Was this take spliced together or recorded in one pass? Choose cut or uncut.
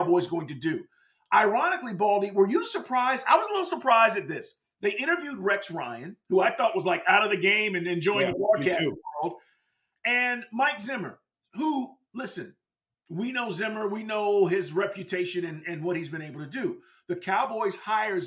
uncut